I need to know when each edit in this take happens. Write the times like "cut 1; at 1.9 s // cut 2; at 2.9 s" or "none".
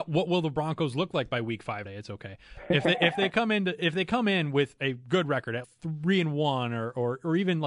cut 1; at 1.8 s // cut 2; at 5.6 s